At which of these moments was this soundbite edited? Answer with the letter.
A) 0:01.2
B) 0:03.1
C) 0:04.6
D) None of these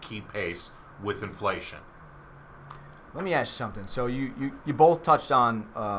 C